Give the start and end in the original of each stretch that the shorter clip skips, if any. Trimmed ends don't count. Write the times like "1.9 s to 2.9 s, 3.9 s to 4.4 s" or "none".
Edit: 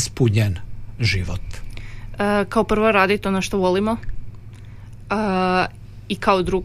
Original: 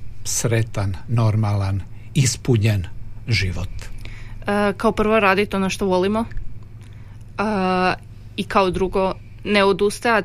none